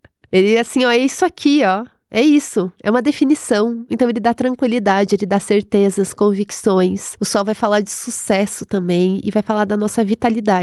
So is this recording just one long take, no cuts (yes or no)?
yes